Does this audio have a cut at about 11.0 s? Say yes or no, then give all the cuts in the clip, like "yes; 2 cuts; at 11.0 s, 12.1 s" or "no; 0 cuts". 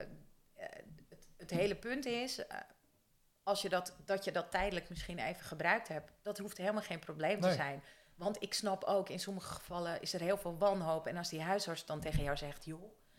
no; 0 cuts